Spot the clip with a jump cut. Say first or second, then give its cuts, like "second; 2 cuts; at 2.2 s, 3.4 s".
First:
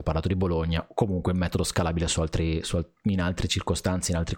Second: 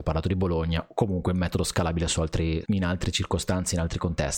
second; 1 cut; at 2.6 s